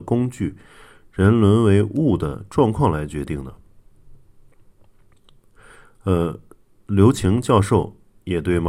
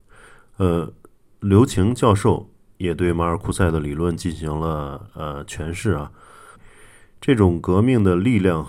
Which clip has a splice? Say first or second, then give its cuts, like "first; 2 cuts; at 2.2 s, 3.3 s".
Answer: second; 1 cut; at 6.5 s